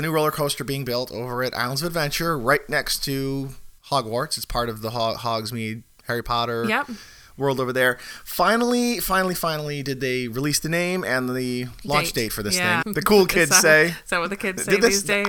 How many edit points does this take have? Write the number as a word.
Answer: two